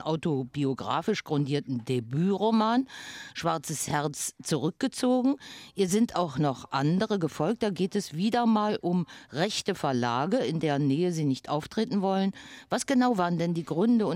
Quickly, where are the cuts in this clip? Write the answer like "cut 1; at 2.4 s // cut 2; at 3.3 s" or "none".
none